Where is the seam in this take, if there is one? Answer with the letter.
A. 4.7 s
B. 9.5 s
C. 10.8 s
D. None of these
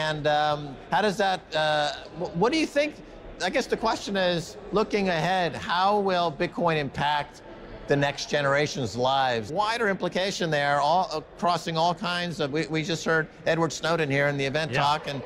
B